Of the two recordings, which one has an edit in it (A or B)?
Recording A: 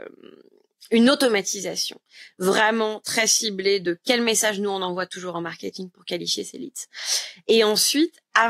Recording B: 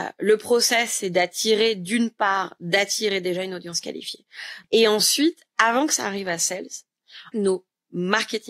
B